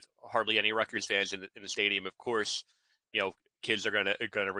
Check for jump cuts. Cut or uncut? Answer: uncut